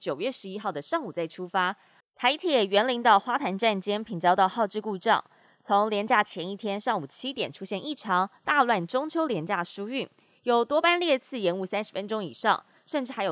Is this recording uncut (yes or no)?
no